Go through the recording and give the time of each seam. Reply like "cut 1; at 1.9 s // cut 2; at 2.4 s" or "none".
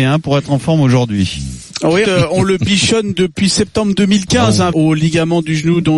cut 1; at 2.0 s // cut 2; at 4.7 s